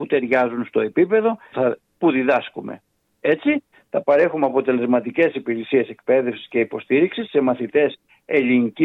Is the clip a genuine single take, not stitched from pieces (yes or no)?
no